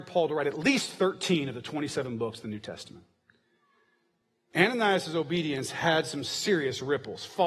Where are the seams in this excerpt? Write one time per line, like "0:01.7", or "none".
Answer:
none